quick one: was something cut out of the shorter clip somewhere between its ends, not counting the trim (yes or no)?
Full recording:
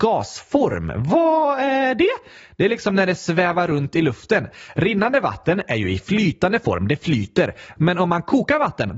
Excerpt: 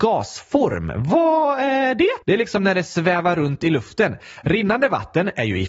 yes